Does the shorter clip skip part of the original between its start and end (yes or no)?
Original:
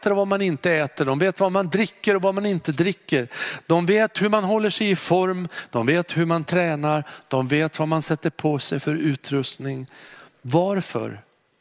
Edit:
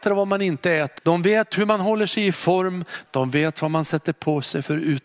yes